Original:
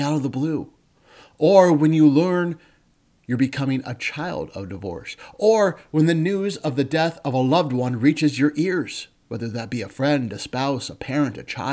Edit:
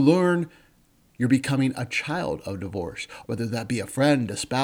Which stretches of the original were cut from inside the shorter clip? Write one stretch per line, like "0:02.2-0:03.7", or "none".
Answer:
0:05.3-0:09.2